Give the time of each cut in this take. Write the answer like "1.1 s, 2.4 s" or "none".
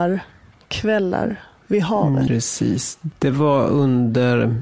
2.3 s